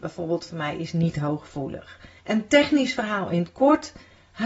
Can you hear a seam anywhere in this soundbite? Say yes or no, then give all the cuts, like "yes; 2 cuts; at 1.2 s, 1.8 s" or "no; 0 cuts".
yes; 1 cut; at 2.2 s